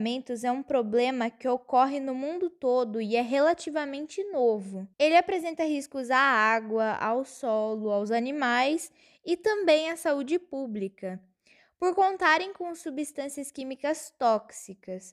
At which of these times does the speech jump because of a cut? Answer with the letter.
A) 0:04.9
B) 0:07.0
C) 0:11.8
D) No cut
A